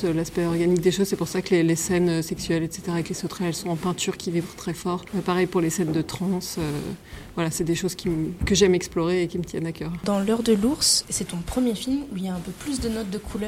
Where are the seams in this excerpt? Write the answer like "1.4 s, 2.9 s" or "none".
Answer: none